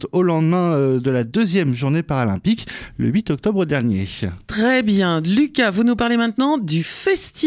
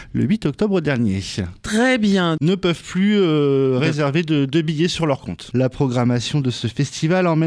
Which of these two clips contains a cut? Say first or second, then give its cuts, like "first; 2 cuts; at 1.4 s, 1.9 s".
second; 2 cuts; at 2.4 s, 5.5 s